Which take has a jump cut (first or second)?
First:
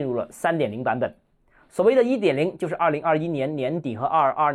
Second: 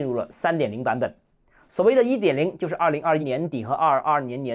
second